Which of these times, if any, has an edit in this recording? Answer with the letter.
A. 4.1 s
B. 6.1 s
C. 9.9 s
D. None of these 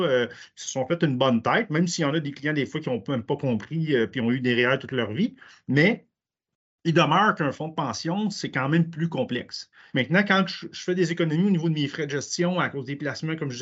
C